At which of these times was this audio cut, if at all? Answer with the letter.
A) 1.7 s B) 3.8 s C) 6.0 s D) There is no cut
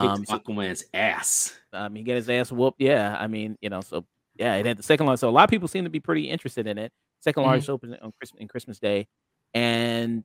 A